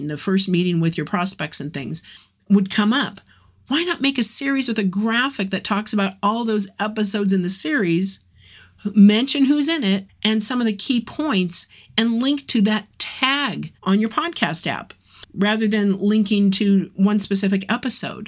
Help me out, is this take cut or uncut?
cut